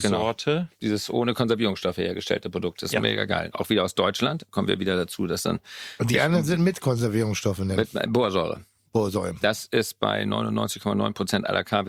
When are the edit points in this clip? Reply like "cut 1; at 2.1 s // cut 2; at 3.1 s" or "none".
none